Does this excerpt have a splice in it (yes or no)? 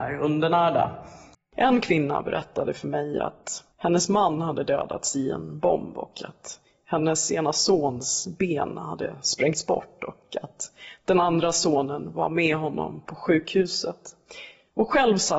yes